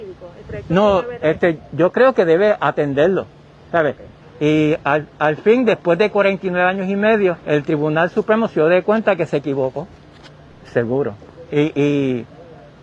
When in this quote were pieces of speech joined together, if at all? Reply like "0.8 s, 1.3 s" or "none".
4.2 s, 7.4 s, 10.5 s